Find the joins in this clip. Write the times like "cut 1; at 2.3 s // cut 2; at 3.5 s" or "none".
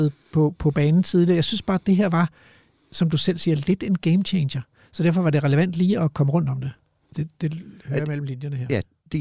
cut 1; at 7.1 s